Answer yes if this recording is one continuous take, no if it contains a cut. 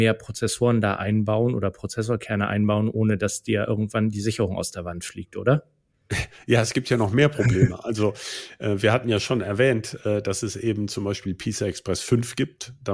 yes